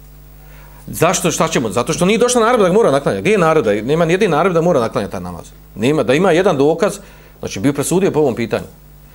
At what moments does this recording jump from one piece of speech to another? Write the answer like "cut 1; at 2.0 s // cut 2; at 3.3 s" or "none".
none

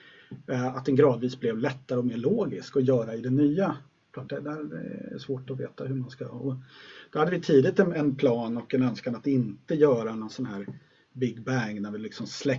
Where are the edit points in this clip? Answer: cut 1; at 4.3 s // cut 2; at 7.9 s

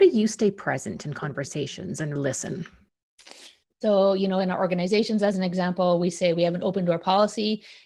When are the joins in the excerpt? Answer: cut 1; at 2.2 s // cut 2; at 3.7 s

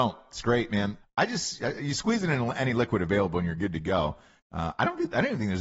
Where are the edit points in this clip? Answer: cut 1; at 1.0 s // cut 2; at 4.4 s

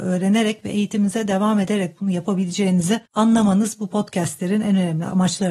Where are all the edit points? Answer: cut 1; at 3.1 s

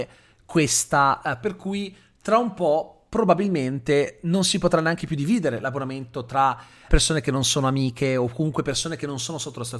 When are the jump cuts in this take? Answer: cut 1; at 1.4 s // cut 2; at 6.9 s

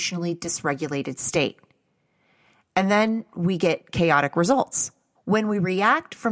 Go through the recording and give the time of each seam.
cut 1; at 5.1 s

